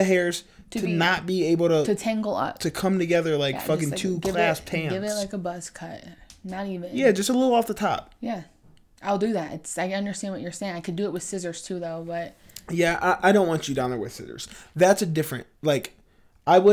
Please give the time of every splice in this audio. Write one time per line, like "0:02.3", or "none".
none